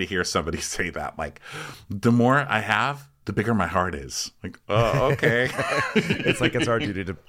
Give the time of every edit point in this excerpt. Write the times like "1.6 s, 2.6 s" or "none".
none